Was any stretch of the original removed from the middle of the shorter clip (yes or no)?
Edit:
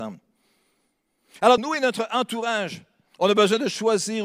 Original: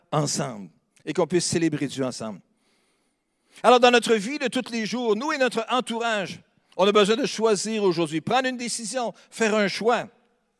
yes